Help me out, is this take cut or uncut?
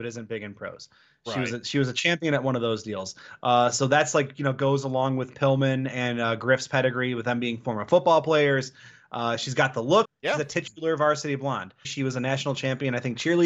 cut